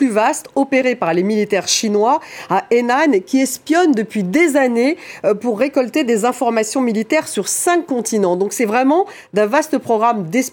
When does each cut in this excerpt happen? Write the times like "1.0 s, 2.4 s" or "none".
none